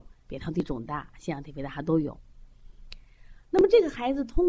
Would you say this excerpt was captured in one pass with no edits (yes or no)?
yes